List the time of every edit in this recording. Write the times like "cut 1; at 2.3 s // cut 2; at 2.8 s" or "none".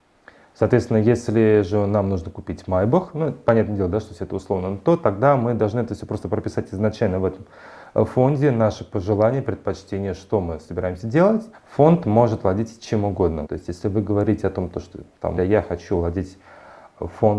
cut 1; at 11.5 s // cut 2; at 13.4 s // cut 3; at 15.4 s